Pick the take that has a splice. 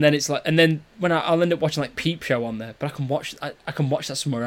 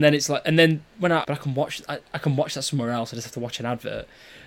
second; 1 cut; at 1.2 s

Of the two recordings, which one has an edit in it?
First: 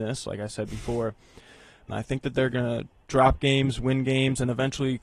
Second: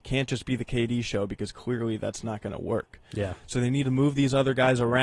first; 1 cut; at 1.9 s

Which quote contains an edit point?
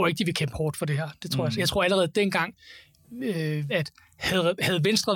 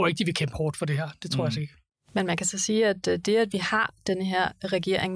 first; 2 cuts; at 1.6 s, 3.7 s

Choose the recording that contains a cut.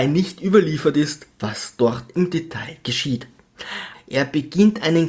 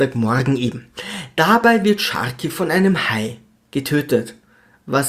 first; 1 cut; at 3.9 s

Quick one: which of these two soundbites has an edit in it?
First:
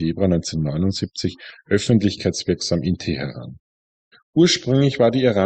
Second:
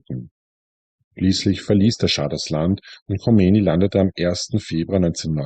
first; 1 cut; at 4.1 s

